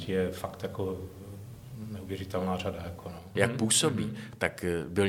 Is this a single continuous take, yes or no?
no